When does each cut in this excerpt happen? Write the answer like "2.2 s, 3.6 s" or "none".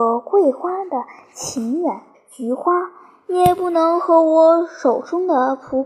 2.1 s